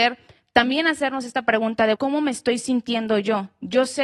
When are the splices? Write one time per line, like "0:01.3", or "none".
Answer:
0:01.9